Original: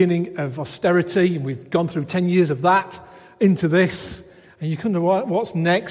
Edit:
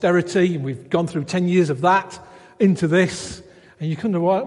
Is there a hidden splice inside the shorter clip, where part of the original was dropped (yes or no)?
no